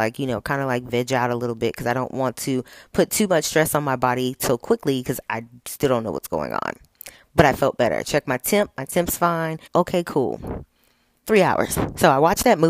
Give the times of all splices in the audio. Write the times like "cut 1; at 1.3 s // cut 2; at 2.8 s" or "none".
cut 1; at 9.7 s // cut 2; at 11.2 s